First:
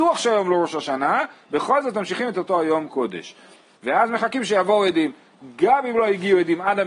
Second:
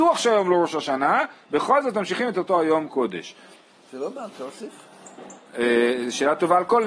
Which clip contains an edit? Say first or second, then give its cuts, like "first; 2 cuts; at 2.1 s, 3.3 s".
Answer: first; 1 cut; at 3.7 s